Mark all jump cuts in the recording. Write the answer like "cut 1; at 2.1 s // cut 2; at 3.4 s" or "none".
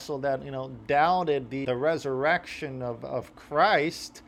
cut 1; at 1.6 s